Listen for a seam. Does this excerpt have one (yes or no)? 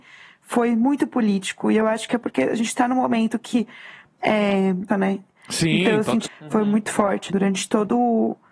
yes